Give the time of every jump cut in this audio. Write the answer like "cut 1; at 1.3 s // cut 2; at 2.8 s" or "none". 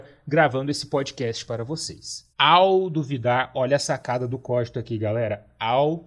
cut 1; at 2.3 s